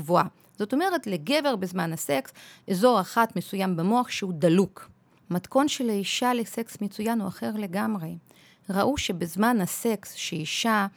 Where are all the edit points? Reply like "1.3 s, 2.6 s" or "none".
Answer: 5.2 s